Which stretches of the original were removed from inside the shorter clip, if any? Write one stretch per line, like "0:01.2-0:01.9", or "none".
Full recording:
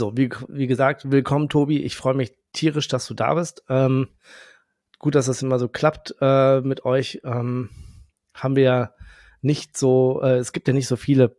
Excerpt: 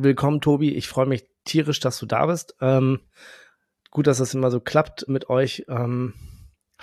0:06.2-0:06.6